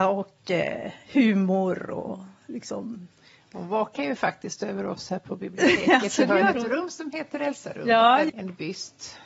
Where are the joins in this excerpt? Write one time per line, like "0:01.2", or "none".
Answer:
0:08.3